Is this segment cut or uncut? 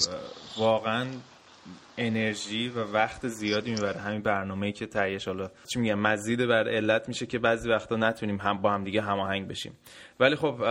cut